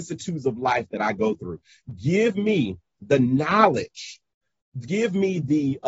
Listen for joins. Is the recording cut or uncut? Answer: uncut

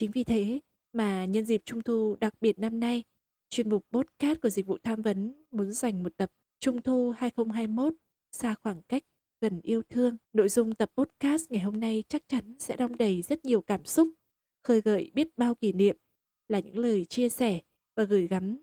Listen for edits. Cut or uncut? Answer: cut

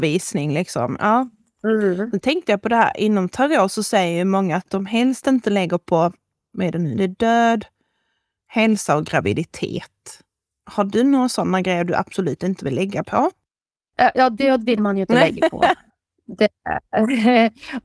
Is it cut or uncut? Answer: uncut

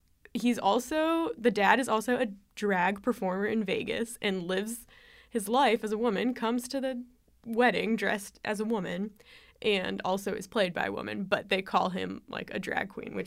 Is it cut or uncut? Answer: uncut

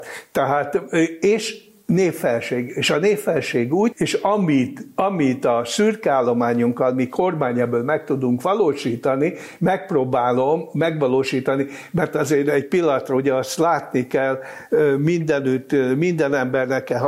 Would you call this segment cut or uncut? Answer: cut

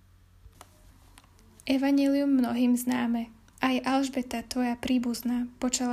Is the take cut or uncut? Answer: cut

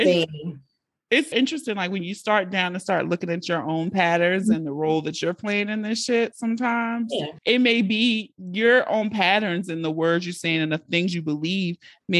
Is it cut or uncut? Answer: cut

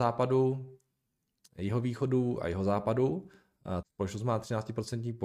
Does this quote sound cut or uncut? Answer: cut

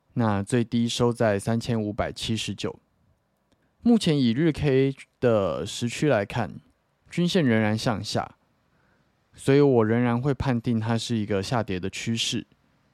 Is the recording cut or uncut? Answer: cut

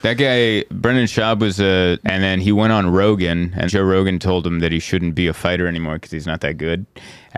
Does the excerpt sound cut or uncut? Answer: cut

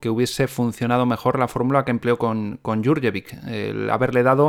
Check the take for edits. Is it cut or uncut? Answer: uncut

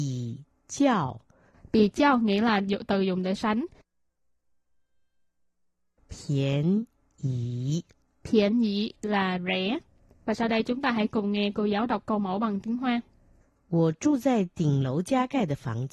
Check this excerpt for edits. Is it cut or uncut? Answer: cut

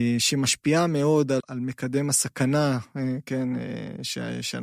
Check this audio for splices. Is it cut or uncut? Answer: cut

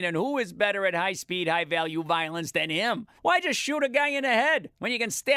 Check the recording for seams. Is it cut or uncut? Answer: cut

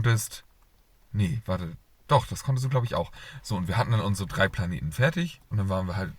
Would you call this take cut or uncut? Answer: cut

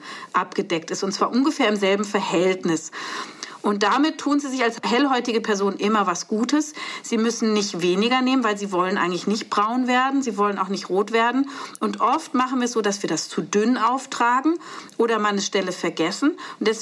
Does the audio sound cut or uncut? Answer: uncut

